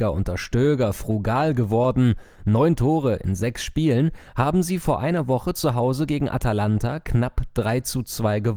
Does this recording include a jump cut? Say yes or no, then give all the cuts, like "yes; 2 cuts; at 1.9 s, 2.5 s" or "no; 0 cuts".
no; 0 cuts